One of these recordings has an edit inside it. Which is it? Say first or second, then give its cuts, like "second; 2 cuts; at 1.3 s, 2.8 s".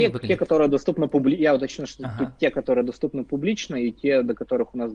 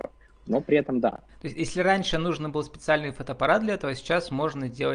second; 1 cut; at 1.3 s